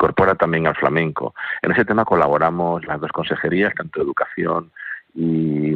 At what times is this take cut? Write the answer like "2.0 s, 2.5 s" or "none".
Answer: none